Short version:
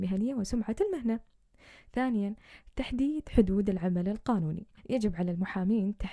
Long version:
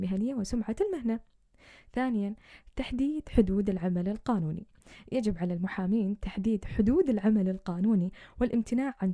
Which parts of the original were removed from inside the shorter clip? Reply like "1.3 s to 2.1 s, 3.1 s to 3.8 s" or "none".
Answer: 4.8 s to 5.0 s